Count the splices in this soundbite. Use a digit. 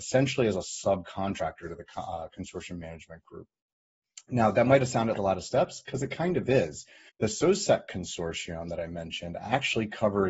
2